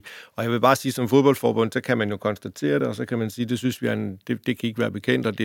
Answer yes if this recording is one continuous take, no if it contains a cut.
yes